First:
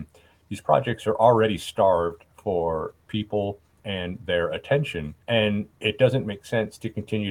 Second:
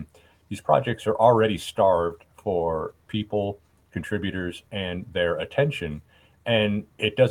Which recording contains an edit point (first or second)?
first